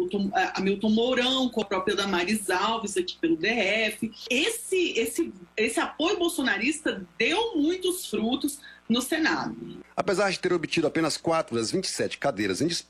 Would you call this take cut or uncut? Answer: uncut